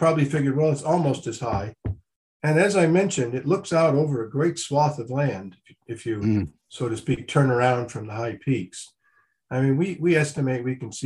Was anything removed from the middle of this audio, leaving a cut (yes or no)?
no